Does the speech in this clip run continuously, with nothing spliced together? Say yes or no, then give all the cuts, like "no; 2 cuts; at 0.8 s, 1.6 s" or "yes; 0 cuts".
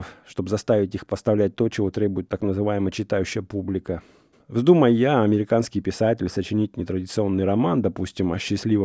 no; 1 cut; at 4.3 s